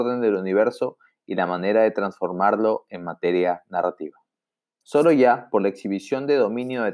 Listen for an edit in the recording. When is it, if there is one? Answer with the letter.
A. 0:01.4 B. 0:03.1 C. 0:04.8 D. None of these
C